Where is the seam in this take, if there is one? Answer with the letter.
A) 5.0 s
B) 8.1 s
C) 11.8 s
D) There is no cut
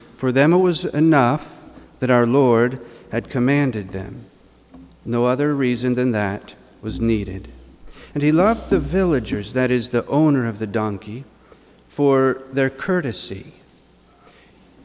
D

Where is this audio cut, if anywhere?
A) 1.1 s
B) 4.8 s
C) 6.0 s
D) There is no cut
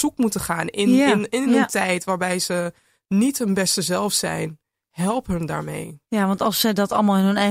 C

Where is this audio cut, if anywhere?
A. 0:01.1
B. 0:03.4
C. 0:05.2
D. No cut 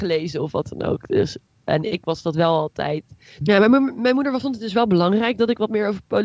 B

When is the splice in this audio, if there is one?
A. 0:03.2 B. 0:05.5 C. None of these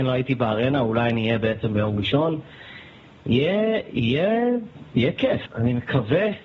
B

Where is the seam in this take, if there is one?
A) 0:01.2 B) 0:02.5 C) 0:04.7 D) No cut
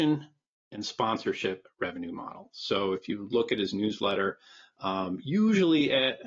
D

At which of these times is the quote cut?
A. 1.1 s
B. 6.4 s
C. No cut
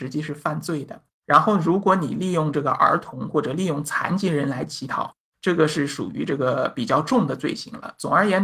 A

